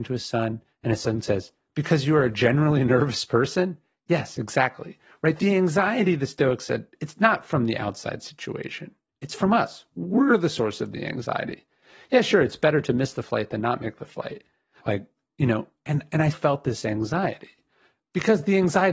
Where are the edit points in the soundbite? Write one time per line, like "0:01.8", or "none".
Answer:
0:14.8
0:16.3